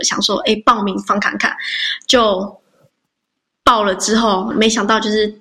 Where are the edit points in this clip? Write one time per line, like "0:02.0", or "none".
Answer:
0:04.5